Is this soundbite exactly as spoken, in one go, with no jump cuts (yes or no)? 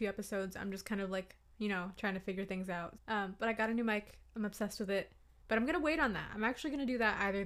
no